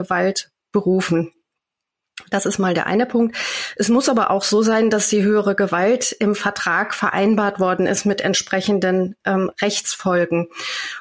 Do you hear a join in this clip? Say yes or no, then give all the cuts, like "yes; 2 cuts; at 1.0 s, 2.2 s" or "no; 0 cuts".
no; 0 cuts